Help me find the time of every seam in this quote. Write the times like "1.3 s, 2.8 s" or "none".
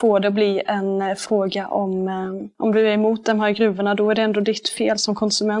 2.6 s

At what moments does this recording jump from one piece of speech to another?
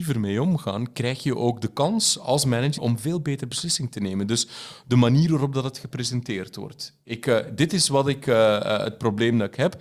2.8 s

